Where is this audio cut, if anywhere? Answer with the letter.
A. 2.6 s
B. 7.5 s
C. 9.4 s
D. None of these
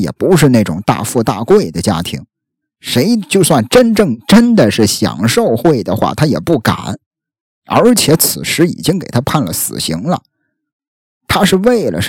A